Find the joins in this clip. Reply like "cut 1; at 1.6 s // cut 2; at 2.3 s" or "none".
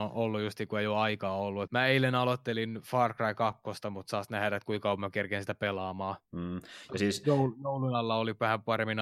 cut 1; at 1.7 s